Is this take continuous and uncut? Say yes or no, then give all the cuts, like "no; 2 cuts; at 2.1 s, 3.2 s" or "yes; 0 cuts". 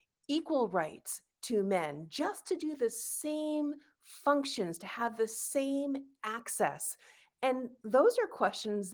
yes; 0 cuts